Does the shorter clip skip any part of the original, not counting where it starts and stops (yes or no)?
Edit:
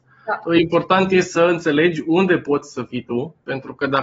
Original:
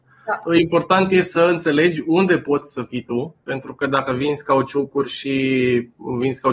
no